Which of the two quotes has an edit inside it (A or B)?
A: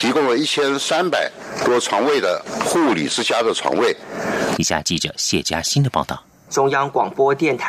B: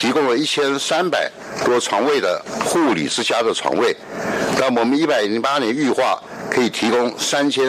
A